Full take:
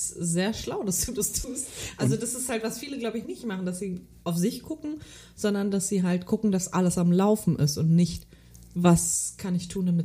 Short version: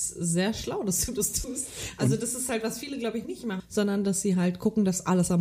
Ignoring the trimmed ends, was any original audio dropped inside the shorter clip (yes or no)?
yes